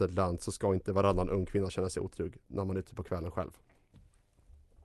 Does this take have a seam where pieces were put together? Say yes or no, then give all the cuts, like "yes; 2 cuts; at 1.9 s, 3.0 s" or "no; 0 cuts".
no; 0 cuts